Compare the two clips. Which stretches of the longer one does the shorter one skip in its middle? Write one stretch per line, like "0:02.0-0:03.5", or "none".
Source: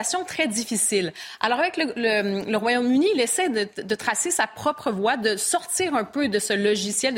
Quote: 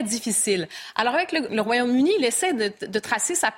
0:01.9-0:02.4